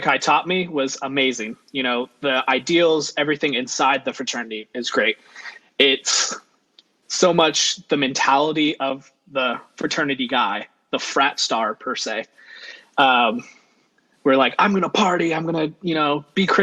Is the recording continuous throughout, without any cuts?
yes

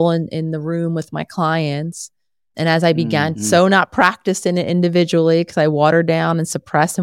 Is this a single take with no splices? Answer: no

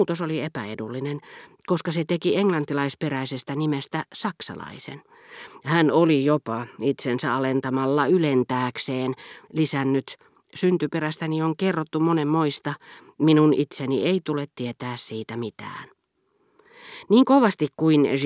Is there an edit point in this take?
no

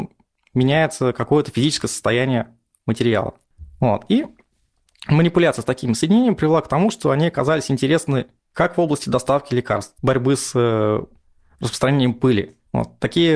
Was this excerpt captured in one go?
no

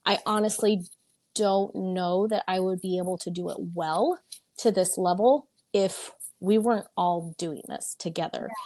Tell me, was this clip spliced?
no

